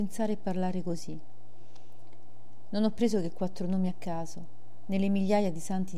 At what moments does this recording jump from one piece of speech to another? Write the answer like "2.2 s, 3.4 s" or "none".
none

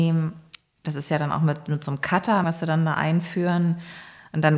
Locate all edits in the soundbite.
2.4 s

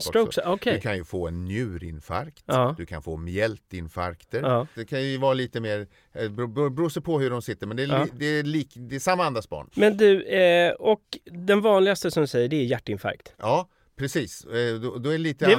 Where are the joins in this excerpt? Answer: 4.7 s, 9.7 s, 13.3 s

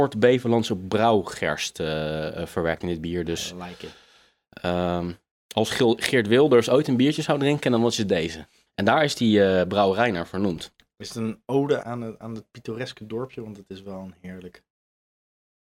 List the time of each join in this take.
8.7 s, 11.8 s

